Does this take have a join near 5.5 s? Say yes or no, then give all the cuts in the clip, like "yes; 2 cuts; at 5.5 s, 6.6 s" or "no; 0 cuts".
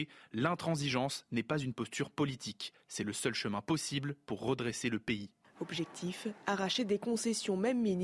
yes; 1 cut; at 5.5 s